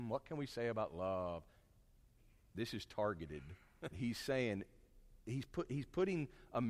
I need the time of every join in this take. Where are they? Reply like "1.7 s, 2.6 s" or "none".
3.9 s, 5.2 s